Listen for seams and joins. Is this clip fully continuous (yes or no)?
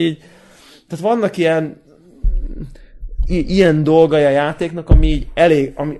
yes